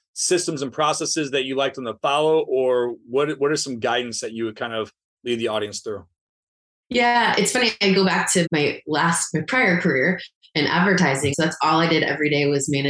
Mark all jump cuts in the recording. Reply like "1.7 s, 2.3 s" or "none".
8.4 s, 11.3 s